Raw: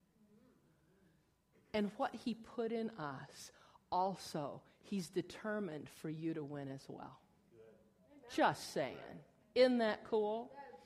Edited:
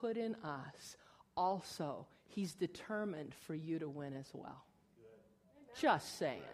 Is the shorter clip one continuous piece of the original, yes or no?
yes